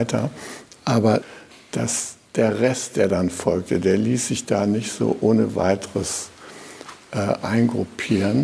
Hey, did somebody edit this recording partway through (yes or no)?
no